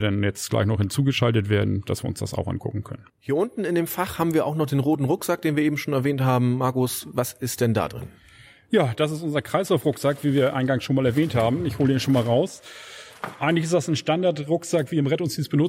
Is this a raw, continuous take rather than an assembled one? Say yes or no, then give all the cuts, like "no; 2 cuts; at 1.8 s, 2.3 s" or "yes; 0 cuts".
yes; 0 cuts